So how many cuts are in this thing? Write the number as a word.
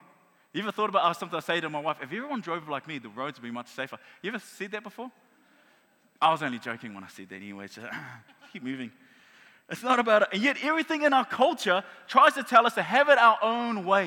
zero